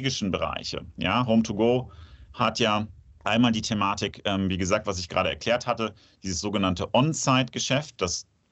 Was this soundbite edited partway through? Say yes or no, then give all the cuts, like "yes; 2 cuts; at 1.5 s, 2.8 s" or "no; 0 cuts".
no; 0 cuts